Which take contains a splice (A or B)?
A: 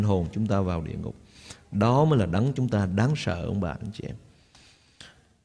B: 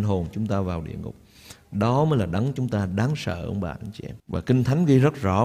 B